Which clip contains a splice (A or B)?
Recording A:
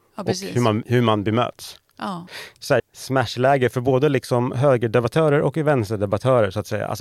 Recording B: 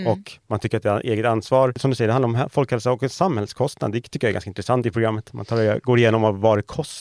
A